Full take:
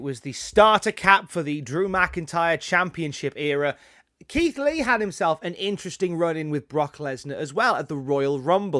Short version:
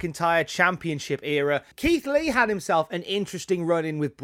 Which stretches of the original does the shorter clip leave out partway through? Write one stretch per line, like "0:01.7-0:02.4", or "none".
0:03.8-0:04.2